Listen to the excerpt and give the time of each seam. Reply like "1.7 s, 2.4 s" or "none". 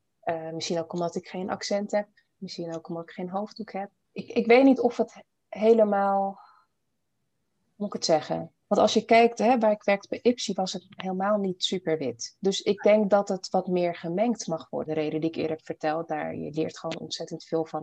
4.0 s, 8.6 s, 14.9 s